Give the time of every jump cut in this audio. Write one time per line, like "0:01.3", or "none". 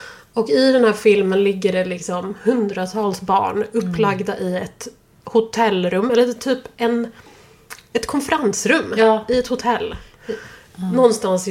none